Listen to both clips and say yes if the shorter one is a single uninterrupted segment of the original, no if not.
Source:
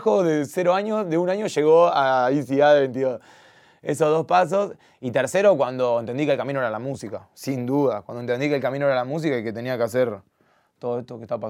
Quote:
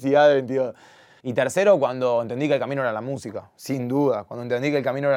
no